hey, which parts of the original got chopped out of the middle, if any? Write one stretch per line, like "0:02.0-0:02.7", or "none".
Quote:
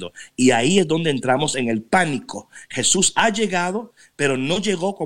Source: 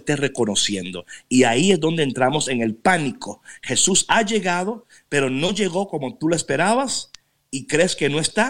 none